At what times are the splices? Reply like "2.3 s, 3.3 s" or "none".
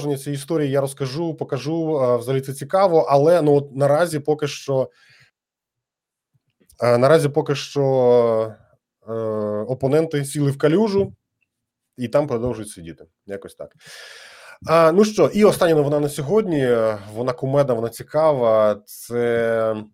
none